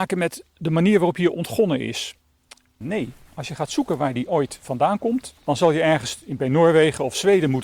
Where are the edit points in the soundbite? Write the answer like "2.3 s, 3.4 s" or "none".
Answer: 2.8 s, 5.4 s

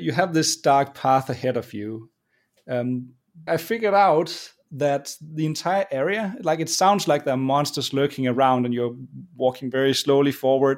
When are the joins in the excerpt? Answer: 3.5 s

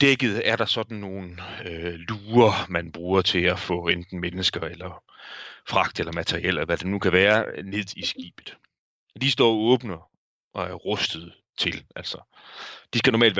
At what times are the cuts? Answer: none

